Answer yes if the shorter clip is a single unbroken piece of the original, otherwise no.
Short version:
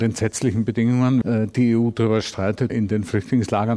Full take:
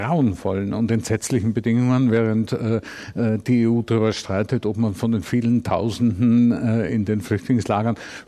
no